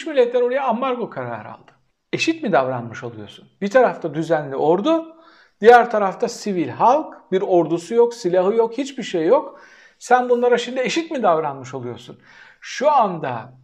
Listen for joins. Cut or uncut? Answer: uncut